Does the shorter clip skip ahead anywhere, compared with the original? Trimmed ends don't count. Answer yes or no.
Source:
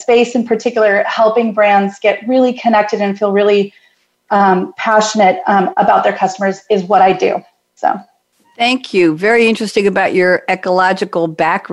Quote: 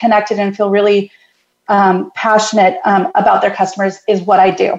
no